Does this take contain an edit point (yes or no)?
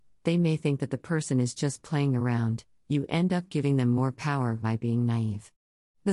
no